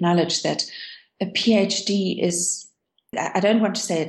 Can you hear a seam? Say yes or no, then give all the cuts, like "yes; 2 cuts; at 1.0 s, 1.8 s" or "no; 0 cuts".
yes; 1 cut; at 3.1 s